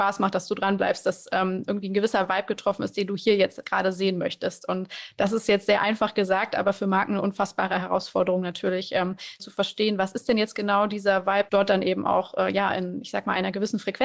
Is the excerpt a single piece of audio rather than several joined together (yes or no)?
no